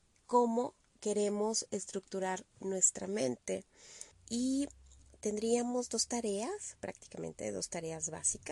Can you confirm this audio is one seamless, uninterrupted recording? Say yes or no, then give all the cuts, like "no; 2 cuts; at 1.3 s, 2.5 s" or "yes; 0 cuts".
no; 1 cut; at 4.1 s